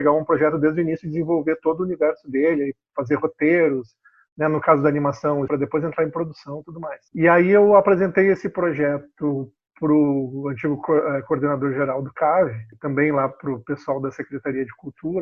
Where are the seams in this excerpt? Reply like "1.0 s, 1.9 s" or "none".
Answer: 5.5 s